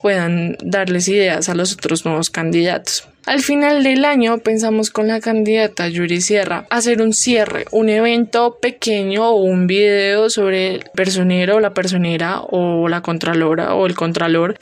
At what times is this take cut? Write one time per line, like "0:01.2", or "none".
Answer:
0:03.1